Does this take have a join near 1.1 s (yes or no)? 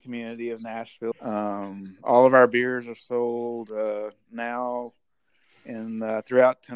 yes